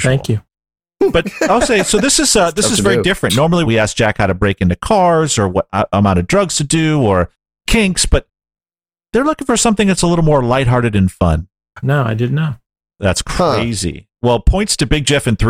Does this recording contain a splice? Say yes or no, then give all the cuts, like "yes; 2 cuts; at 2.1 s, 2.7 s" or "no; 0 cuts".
yes; 2 cuts; at 3.6 s, 11.8 s